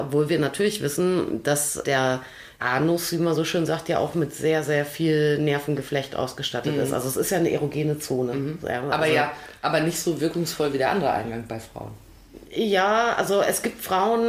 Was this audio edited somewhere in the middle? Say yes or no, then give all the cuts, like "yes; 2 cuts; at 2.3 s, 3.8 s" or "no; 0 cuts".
no; 0 cuts